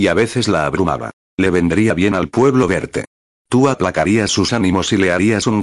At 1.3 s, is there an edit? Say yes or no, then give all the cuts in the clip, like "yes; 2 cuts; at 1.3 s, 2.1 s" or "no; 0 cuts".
yes; 2 cuts; at 1.3 s, 3.4 s